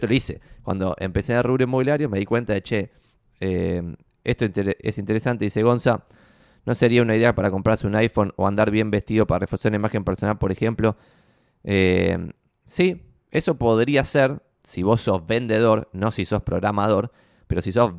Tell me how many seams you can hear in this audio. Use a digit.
1